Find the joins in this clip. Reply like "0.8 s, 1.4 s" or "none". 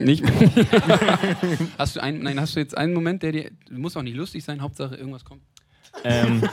none